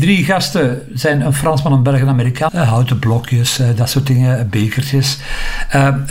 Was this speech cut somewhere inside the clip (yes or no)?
yes